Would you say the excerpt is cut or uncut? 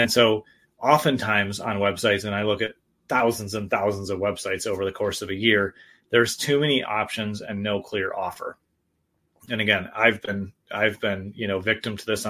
uncut